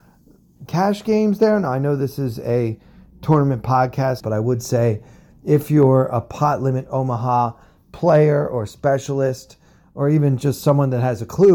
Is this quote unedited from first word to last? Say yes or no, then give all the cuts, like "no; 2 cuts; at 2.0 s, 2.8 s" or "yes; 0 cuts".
no; 1 cut; at 4.2 s